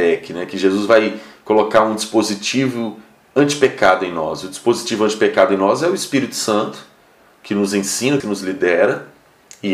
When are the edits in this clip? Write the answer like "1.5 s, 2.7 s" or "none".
8.2 s